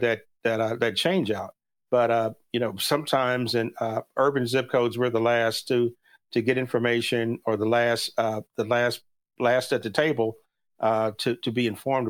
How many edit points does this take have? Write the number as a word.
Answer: zero